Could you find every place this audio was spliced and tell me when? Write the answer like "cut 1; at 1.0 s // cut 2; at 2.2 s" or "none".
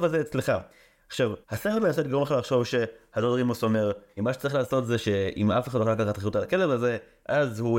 cut 1; at 1.4 s // cut 2; at 4.2 s